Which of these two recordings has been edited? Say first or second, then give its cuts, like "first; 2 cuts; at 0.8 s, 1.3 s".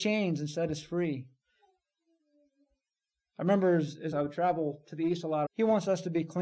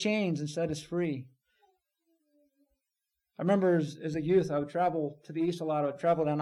first; 2 cuts; at 4.1 s, 5.4 s